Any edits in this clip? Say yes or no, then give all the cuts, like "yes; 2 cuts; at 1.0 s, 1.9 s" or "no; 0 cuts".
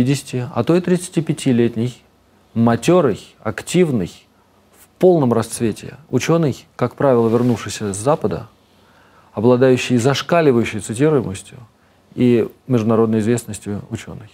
no; 0 cuts